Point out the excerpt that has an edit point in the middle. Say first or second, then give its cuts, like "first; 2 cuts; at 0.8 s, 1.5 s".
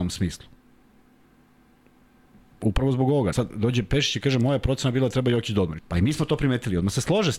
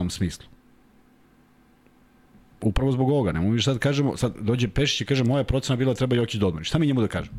first; 2 cuts; at 3.3 s, 5.8 s